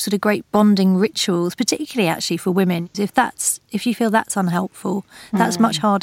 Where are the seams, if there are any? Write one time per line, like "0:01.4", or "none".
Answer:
0:02.9